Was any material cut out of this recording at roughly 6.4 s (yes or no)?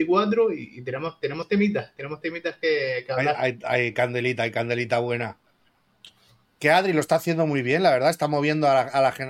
yes